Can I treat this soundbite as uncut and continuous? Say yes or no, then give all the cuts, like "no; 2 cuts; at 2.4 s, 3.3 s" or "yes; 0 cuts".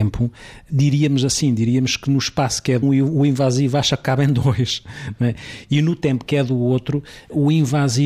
no; 1 cut; at 2.8 s